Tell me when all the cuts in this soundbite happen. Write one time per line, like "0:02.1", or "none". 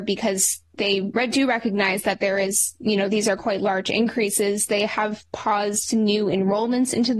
none